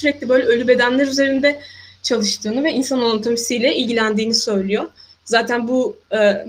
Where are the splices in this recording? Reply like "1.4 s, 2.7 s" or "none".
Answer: none